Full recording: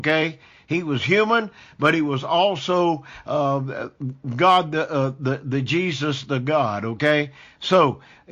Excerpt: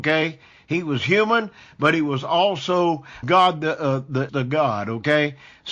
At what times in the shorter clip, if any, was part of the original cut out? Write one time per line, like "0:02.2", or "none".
0:03.2
0:04.3